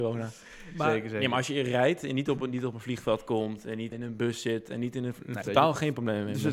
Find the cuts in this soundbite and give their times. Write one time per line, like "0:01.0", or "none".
0:03.9
0:05.4